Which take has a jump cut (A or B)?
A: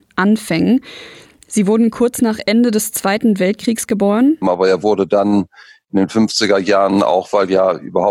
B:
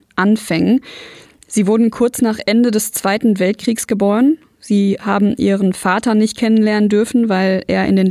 A